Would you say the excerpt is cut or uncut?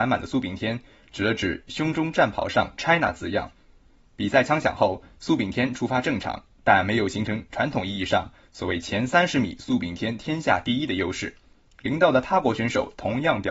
uncut